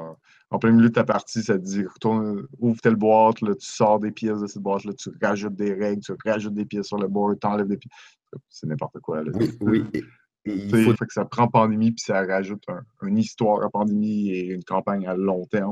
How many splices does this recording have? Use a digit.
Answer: 2